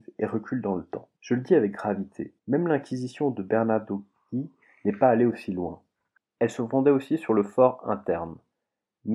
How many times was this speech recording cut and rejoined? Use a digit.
2